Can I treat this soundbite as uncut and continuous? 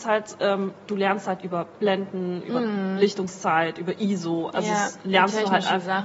yes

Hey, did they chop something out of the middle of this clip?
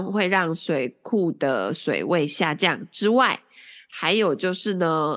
no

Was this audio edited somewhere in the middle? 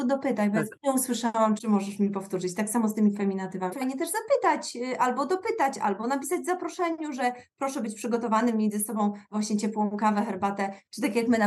yes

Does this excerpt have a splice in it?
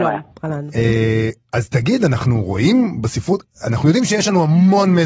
no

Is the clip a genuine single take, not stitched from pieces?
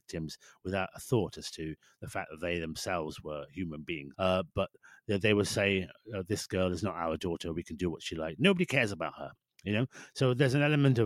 no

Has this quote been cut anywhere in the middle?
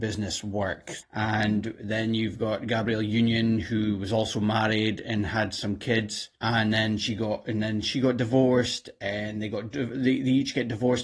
yes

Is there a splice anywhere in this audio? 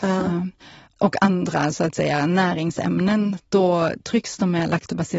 no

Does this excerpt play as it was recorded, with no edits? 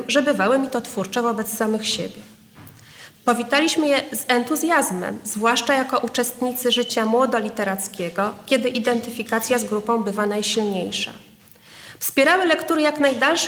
no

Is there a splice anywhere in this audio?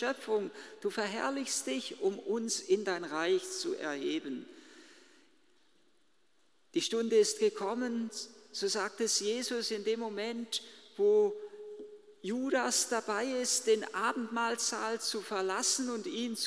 no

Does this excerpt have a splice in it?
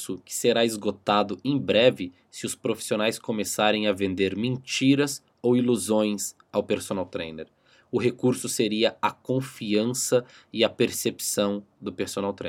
no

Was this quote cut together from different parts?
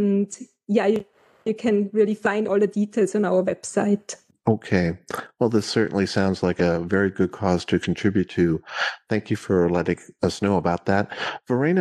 no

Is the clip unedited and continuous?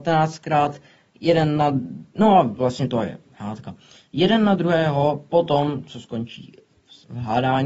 yes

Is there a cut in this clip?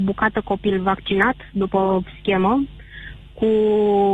no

